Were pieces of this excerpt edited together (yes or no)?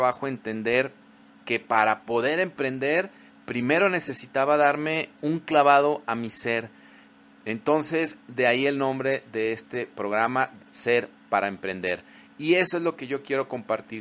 yes